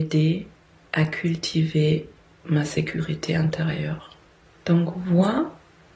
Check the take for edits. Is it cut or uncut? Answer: uncut